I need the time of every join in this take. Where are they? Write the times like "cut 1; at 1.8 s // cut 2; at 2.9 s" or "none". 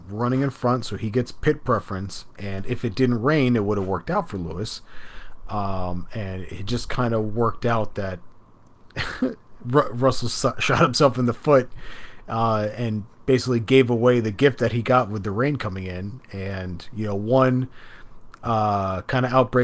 none